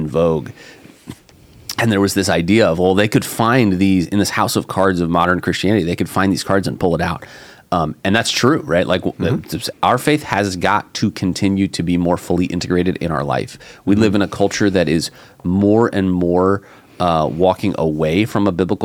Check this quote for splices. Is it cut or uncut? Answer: cut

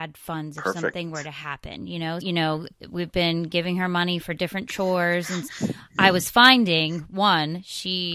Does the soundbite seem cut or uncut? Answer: cut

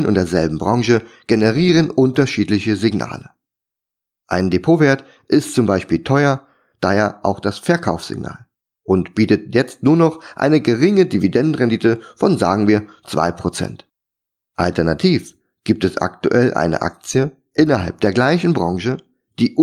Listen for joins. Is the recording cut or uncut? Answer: uncut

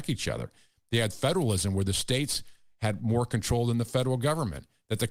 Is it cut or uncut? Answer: uncut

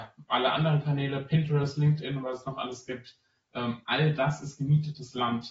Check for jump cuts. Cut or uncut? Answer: uncut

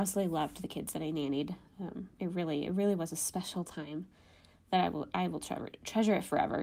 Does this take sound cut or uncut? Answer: uncut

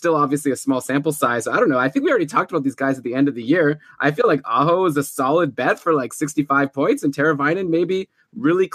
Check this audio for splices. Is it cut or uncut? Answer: uncut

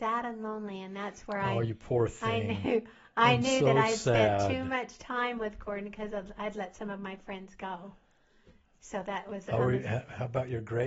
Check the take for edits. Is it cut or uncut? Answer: uncut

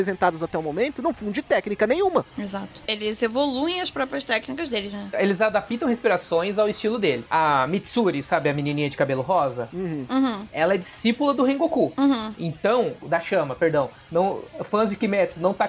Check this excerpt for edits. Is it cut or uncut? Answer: cut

